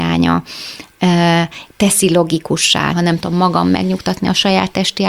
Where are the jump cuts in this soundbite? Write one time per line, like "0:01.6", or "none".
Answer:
0:01.7
0:02.9